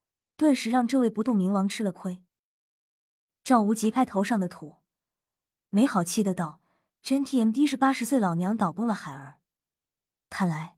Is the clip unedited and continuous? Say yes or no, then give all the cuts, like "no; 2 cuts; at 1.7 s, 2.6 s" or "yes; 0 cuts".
no; 1 cut; at 3.9 s